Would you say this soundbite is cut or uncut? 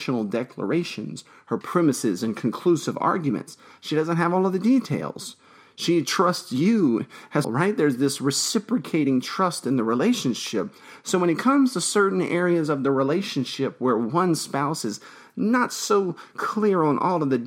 cut